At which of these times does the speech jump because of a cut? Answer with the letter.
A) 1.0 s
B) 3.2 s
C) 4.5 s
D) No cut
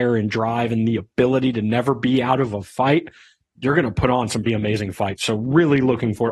C